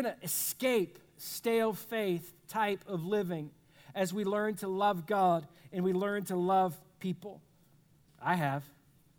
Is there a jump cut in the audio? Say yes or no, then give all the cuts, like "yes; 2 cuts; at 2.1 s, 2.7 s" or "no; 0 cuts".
yes; 1 cut; at 8.1 s